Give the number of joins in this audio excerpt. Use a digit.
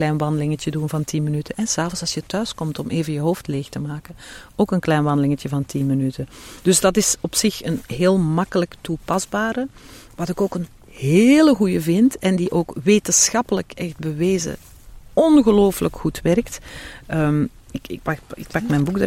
1